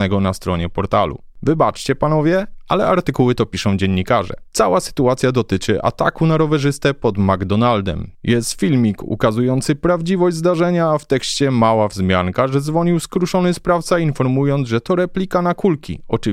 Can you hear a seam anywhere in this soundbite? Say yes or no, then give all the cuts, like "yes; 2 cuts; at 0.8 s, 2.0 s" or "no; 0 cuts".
no; 0 cuts